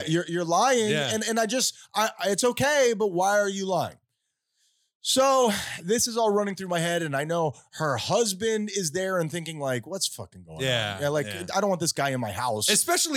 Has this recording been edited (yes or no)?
no